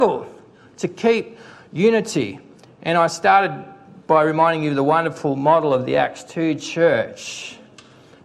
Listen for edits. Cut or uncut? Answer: uncut